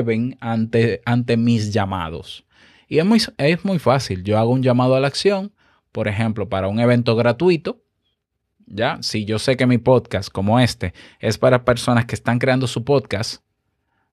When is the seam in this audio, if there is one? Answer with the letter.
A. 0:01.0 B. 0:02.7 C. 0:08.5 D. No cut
D